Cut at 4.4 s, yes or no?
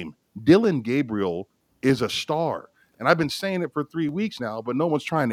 no